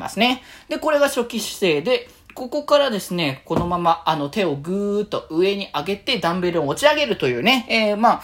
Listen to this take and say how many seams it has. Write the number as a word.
zero